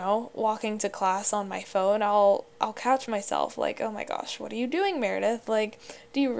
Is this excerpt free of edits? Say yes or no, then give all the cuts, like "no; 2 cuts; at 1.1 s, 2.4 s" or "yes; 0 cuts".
yes; 0 cuts